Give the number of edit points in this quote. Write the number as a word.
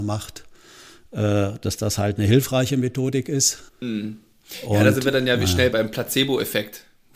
two